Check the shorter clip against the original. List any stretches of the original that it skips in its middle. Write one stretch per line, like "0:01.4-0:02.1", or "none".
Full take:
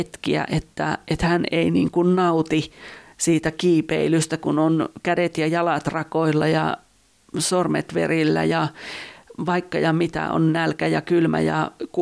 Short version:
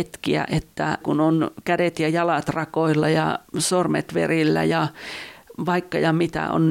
0:01.0-0:04.4
0:06.9-0:07.3